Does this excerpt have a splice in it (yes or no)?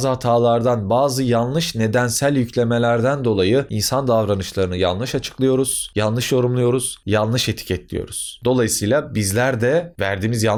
no